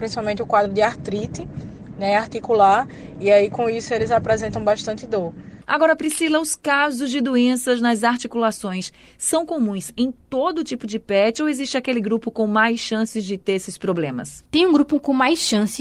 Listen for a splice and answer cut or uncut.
uncut